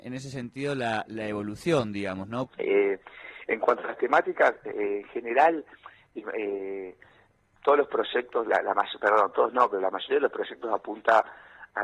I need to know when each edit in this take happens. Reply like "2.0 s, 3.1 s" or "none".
2.5 s